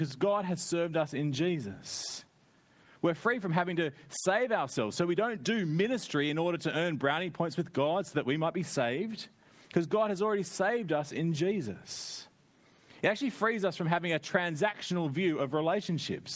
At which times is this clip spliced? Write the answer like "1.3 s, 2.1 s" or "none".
none